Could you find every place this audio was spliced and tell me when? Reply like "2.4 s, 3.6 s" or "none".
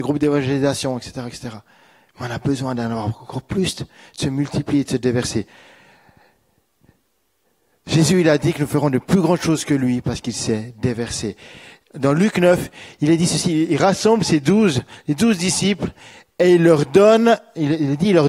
none